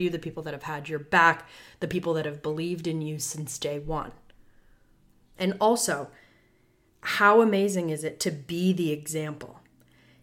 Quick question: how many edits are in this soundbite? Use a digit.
1